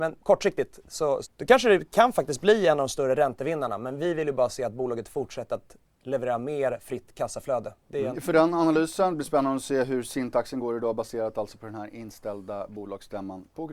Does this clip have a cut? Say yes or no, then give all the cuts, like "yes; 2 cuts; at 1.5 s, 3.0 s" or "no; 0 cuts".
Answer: yes; 2 cuts; at 1.2 s, 8.1 s